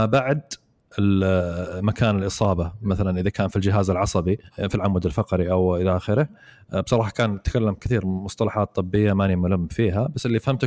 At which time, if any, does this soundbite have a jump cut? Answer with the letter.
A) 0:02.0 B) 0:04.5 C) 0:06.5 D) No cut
B